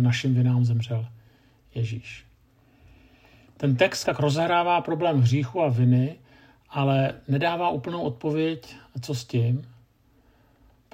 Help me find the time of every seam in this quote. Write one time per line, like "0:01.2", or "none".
0:04.1